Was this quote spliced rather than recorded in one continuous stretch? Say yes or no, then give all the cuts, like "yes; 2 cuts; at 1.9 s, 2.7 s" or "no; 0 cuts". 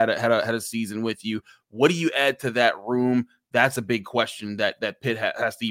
no; 0 cuts